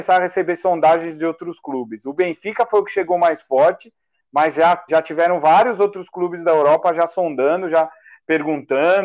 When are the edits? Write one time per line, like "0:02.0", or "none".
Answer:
0:04.9